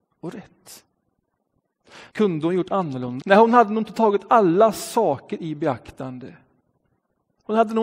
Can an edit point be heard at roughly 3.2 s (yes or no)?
yes